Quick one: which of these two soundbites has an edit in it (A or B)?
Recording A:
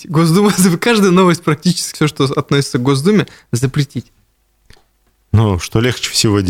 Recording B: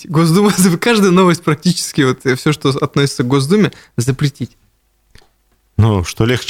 A